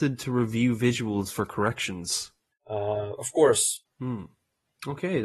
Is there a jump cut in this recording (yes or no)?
yes